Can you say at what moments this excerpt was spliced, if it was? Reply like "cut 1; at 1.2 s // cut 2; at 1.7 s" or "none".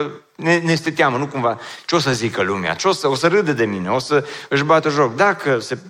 none